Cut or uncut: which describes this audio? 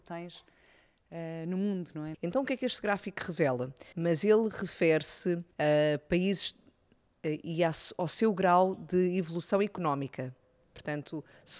cut